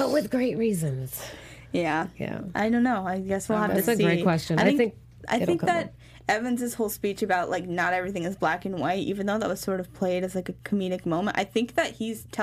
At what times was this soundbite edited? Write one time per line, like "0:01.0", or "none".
0:05.2